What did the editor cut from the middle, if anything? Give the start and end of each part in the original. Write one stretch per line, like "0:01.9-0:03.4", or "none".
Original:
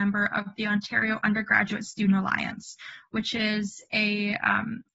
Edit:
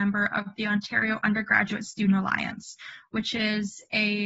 none